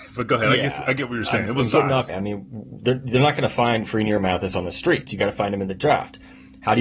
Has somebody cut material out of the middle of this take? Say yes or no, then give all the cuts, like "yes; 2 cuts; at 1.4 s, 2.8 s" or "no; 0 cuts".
yes; 2 cuts; at 2.1 s, 5.1 s